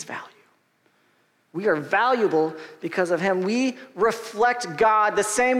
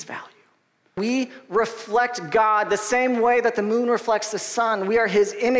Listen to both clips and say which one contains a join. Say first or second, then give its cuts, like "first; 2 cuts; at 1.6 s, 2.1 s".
second; 1 cut; at 1.0 s